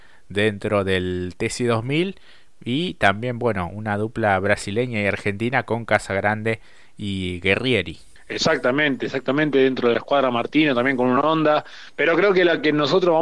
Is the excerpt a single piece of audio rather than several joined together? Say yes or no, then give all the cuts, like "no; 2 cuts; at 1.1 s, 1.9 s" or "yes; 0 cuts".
yes; 0 cuts